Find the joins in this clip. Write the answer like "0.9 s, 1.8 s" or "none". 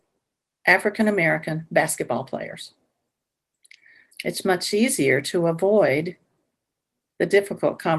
4.1 s